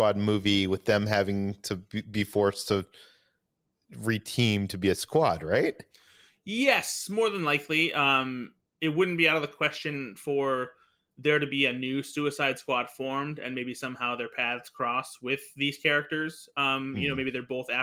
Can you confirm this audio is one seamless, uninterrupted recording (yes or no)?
yes